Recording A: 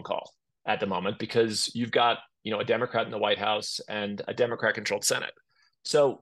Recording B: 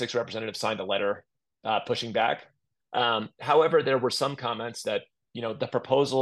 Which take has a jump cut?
B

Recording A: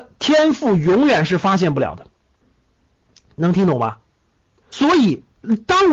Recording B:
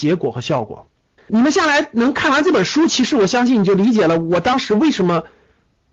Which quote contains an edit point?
B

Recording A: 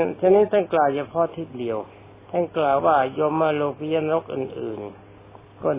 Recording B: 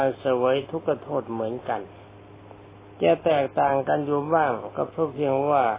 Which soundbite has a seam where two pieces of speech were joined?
A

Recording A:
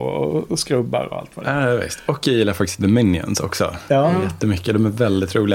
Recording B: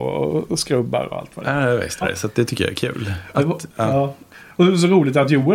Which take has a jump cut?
B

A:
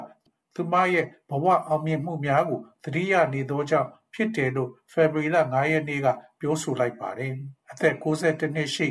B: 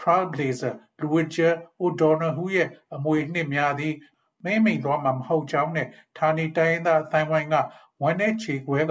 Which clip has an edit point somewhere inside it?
A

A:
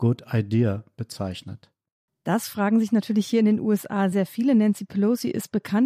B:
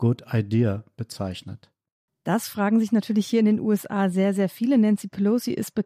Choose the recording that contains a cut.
A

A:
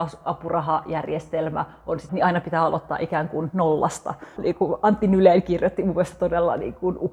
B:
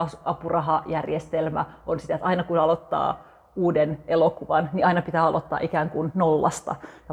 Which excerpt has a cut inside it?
A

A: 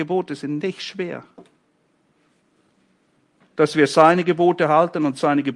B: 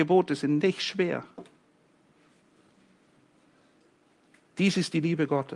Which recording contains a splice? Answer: A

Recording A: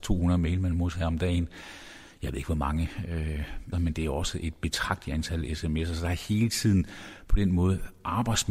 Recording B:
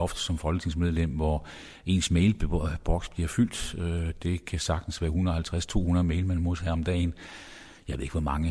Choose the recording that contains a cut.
A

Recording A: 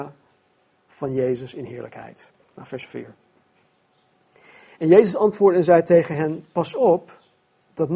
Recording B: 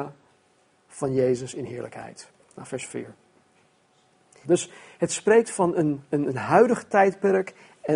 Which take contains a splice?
B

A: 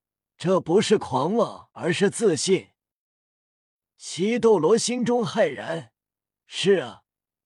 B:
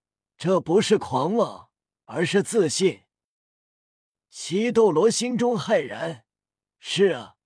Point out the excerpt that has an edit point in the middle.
A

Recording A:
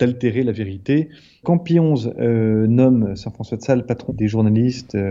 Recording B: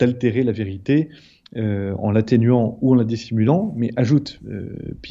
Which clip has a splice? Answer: A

